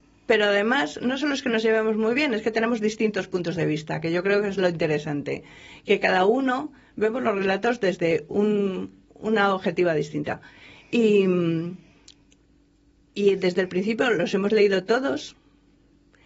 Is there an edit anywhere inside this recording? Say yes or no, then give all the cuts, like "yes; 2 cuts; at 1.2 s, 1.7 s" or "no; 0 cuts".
no; 0 cuts